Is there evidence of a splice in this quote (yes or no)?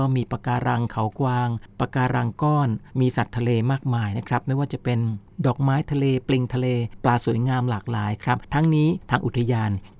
yes